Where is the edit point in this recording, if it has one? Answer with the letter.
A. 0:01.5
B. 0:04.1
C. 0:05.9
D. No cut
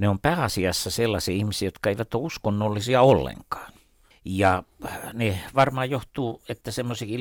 B